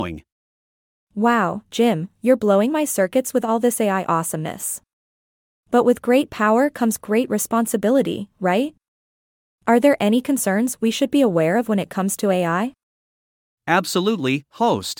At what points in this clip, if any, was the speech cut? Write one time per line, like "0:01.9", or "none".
none